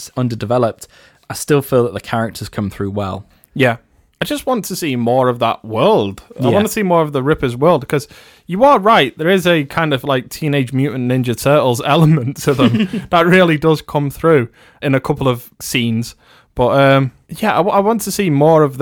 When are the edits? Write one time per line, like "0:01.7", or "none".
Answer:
none